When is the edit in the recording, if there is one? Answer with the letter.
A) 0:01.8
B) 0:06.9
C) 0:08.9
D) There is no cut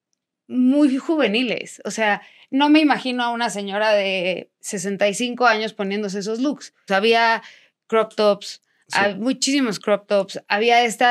B